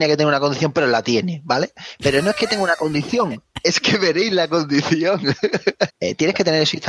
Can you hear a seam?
yes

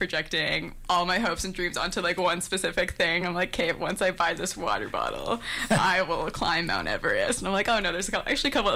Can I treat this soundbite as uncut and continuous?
yes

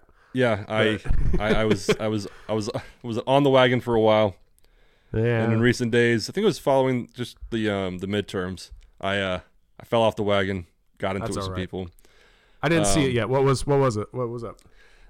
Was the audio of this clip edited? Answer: no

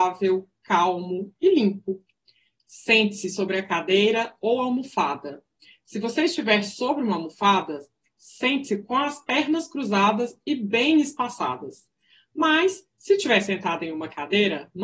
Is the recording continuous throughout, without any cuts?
yes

